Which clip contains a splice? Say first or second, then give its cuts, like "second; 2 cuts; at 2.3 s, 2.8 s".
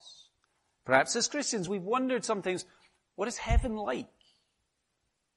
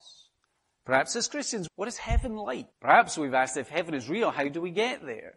second; 2 cuts; at 1.7 s, 2.7 s